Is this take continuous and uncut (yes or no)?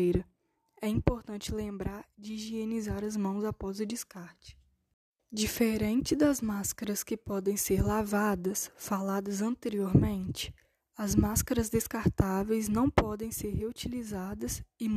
no